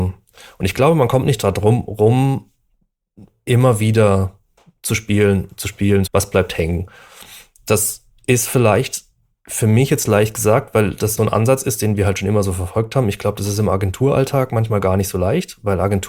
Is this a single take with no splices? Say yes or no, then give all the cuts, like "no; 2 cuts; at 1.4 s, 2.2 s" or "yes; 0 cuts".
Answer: no; 2 cuts; at 6.1 s, 11.2 s